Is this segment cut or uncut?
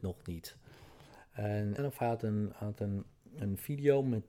cut